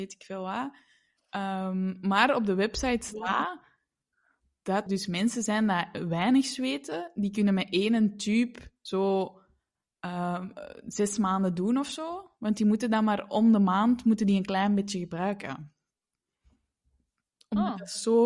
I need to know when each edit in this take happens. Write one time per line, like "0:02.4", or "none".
0:04.9